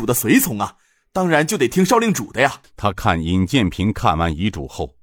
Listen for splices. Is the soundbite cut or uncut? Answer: cut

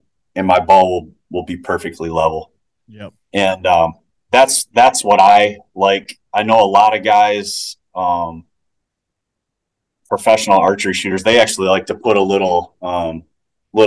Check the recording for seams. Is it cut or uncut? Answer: cut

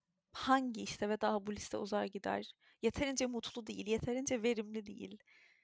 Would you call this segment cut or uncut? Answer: uncut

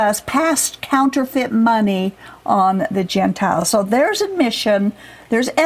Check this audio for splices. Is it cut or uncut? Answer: uncut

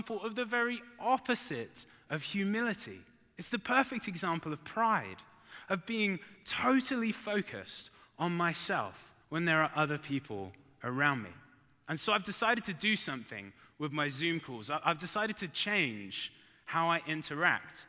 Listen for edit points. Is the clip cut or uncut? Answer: cut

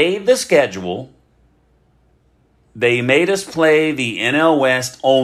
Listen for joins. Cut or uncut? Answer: uncut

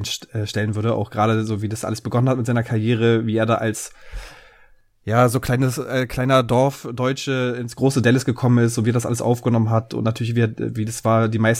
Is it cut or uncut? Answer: uncut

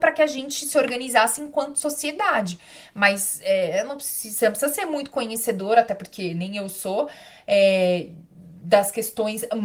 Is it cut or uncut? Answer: uncut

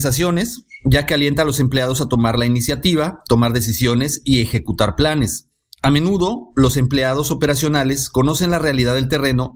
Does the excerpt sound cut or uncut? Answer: uncut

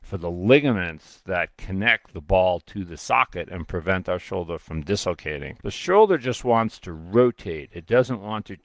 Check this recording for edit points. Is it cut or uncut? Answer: cut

